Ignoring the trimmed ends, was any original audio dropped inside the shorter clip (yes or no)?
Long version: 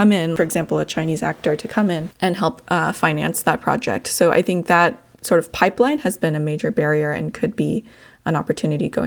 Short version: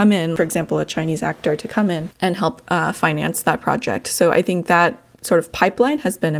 no